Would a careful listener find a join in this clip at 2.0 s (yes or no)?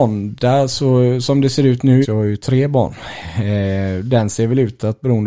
yes